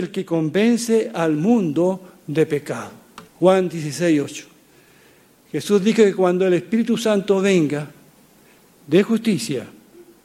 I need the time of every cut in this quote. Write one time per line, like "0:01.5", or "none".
0:03.3
0:08.7